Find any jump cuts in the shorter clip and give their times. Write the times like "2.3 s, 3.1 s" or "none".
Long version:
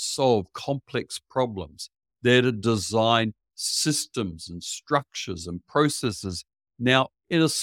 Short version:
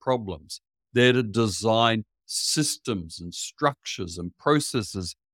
none